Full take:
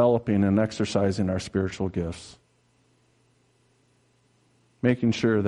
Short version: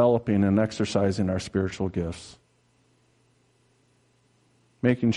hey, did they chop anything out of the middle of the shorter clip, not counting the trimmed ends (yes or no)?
no